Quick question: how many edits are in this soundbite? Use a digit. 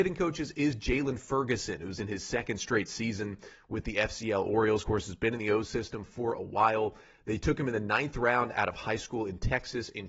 0